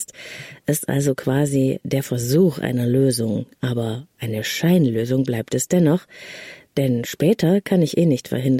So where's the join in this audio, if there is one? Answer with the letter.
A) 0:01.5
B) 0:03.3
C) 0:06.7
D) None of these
C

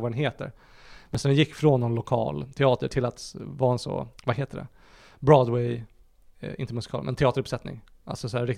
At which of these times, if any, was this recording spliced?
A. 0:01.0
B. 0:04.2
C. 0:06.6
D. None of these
B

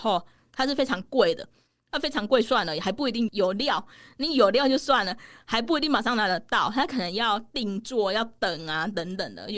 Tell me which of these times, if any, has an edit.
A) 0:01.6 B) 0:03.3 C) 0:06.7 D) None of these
B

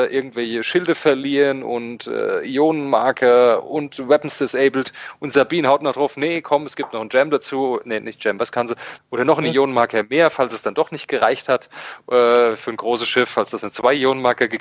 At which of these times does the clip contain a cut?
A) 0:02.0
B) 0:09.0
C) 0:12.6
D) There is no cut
B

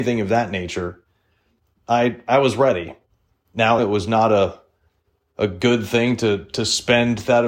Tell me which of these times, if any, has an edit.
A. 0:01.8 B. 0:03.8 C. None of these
B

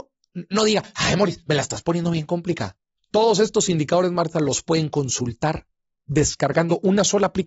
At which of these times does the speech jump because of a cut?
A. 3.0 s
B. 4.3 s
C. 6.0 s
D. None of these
D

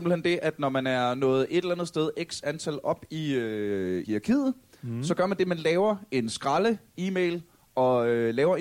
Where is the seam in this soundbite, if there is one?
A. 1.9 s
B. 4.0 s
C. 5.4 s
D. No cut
B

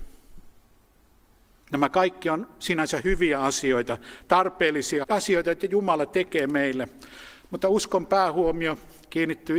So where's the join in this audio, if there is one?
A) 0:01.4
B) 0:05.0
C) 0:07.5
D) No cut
B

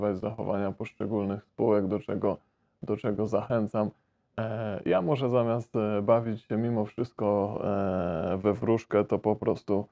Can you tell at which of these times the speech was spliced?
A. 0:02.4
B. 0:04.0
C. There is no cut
C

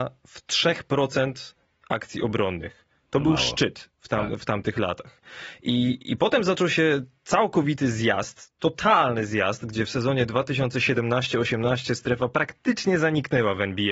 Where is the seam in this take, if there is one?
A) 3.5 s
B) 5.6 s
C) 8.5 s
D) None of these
D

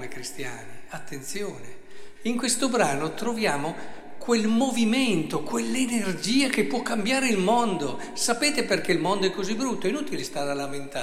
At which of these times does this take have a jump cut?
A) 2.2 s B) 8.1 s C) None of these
A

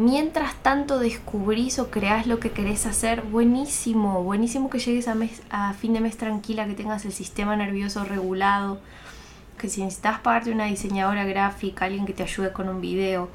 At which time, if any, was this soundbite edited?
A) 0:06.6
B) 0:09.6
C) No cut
B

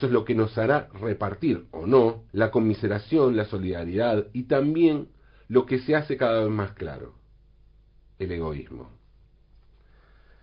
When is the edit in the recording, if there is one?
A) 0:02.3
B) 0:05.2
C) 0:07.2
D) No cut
A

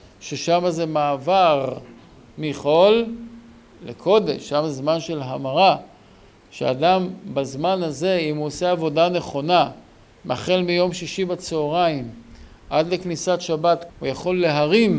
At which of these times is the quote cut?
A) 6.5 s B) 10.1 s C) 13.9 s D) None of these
C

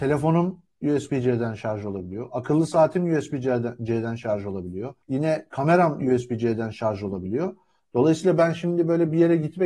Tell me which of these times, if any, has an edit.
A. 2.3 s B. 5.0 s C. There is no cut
B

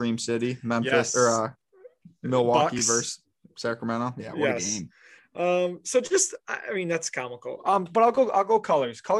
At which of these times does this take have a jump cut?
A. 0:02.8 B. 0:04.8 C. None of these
C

